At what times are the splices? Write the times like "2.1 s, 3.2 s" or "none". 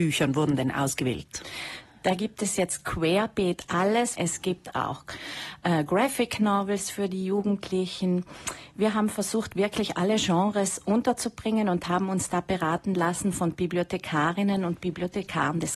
4.2 s